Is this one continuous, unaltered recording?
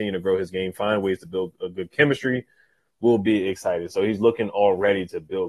yes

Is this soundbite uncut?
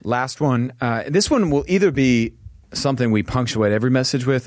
yes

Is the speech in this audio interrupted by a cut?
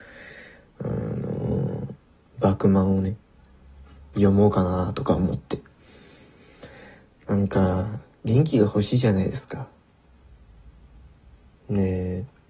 no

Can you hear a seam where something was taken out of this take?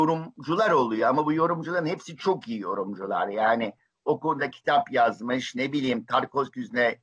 no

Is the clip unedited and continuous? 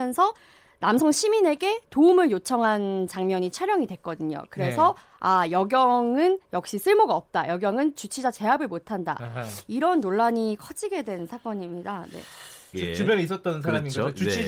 no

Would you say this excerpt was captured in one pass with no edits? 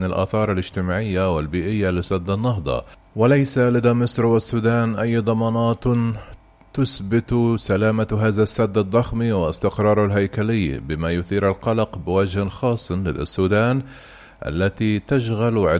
yes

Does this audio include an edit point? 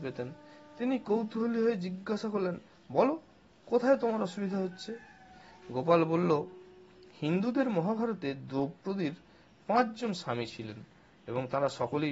no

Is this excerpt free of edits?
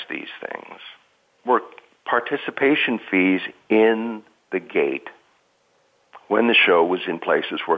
no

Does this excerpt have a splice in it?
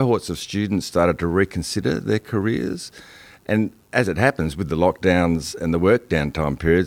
yes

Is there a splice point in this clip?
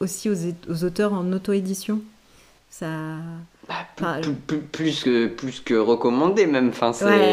no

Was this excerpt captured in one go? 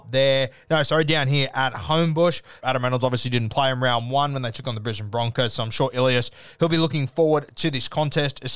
no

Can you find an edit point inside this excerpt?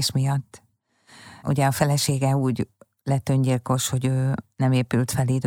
no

